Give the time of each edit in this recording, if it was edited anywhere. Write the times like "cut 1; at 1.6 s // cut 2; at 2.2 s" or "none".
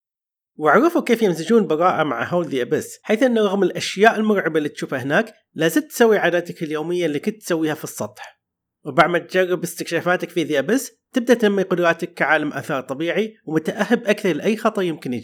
cut 1; at 3.0 s